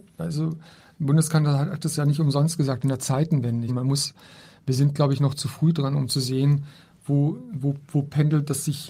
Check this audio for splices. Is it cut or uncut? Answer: cut